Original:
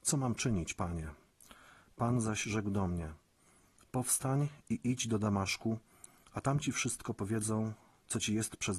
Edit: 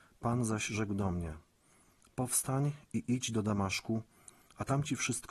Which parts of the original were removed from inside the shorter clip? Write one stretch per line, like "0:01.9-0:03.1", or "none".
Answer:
none